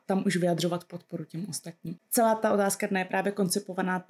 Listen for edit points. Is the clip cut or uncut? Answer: uncut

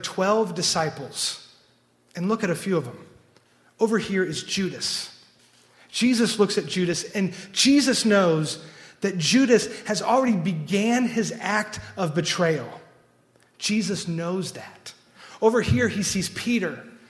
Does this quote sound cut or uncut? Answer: uncut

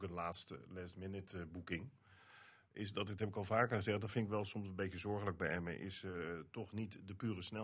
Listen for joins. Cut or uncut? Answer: uncut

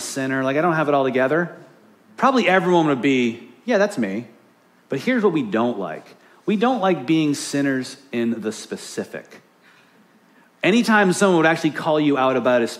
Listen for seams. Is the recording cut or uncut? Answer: uncut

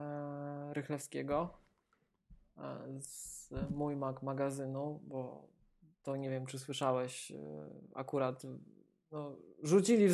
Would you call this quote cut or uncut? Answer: uncut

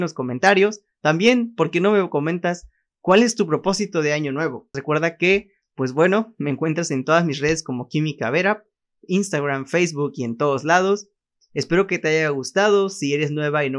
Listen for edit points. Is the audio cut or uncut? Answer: cut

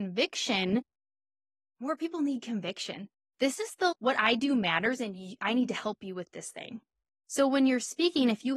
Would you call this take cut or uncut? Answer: cut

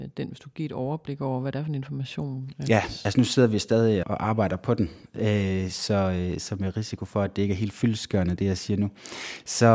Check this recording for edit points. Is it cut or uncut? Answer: cut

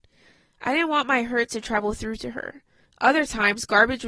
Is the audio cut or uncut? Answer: cut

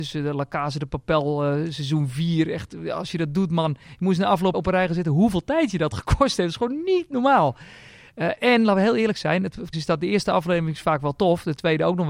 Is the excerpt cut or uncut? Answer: cut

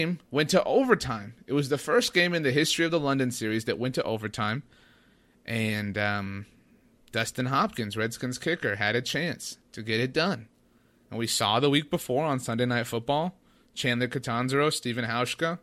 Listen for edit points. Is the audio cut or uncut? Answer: uncut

